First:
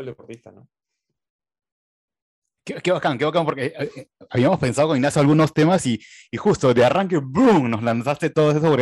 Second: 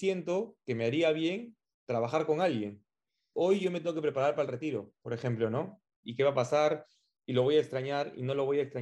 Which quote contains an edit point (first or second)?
second